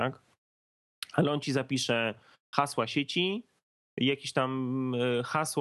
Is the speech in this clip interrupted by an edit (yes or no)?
no